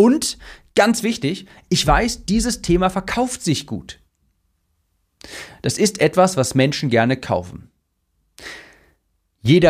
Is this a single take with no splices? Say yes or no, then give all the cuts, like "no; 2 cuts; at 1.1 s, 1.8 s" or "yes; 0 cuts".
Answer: yes; 0 cuts